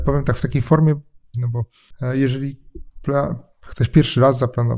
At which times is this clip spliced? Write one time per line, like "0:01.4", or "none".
0:01.3

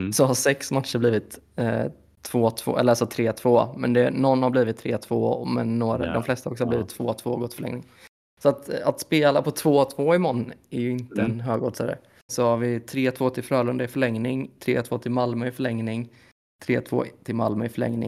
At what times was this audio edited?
0:12.3
0:14.6

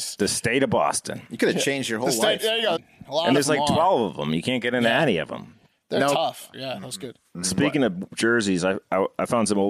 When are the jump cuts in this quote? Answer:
0:02.8
0:06.5

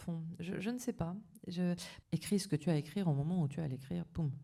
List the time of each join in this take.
0:02.0

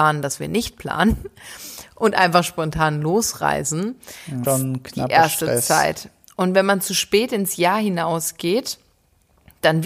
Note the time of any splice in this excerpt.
0:04.4

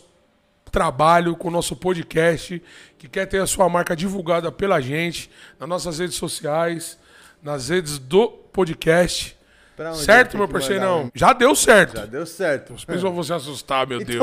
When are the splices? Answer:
0:11.1
0:12.7

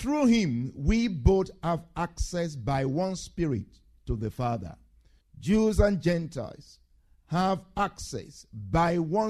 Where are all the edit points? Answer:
0:05.2

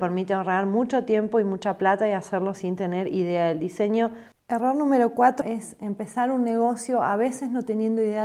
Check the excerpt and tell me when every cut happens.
0:04.3
0:05.4

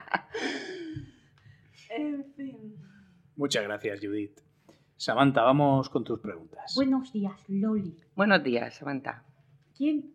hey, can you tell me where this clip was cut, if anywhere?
none

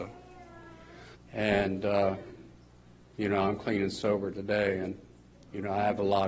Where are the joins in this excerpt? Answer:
0:01.1

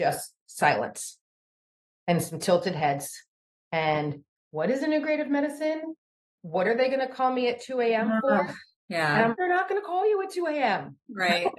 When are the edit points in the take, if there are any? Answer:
0:09.3

